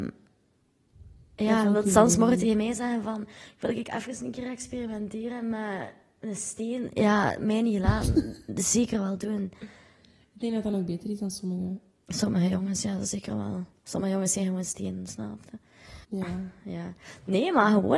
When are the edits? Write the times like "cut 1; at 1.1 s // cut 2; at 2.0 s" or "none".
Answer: cut 1; at 16.0 s